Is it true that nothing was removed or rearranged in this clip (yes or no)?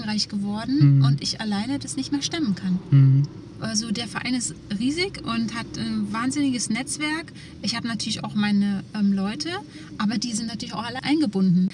yes